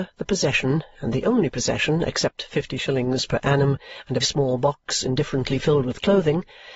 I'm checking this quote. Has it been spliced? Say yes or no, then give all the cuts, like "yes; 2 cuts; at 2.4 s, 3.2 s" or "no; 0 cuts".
yes; 1 cut; at 4.2 s